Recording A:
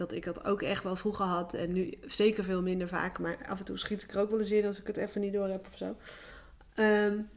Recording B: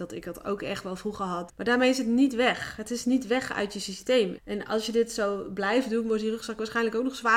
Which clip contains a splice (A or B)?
B